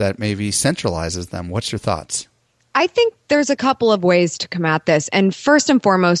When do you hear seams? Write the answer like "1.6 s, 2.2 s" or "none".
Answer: none